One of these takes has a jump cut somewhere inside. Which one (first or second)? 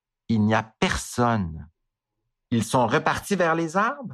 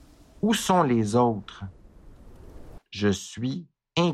second